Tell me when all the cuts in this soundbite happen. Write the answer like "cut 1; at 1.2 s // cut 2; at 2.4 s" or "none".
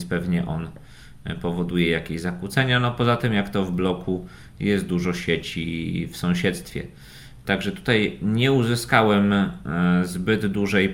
none